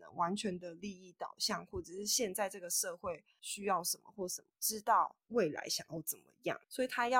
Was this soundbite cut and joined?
yes; 1 cut; at 4.5 s

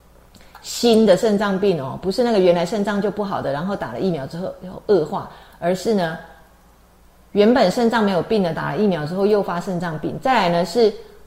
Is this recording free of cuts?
yes; 0 cuts

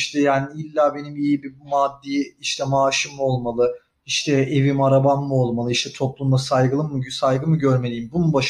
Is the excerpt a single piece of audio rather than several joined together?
yes; 0 cuts

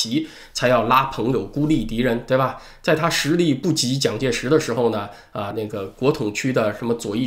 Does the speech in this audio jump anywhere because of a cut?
yes; 1 cut; at 5.5 s

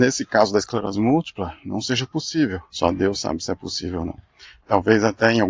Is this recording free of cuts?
no; 1 cut; at 2.7 s

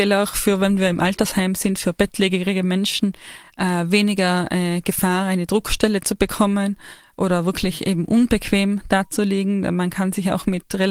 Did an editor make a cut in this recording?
no; 0 cuts

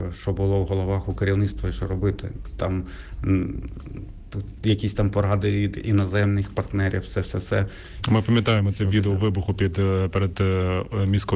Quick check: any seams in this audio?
yes; 1 cut; at 8.0 s

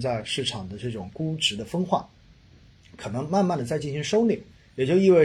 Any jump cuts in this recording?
no; 0 cuts

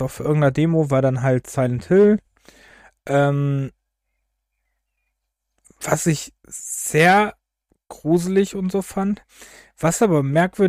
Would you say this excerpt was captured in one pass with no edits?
yes; 0 cuts

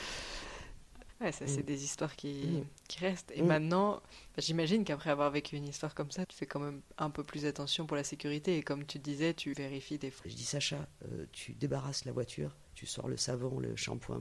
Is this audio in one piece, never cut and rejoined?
no; 1 cut; at 10.2 s

